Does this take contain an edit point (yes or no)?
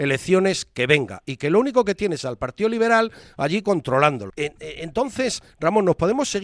yes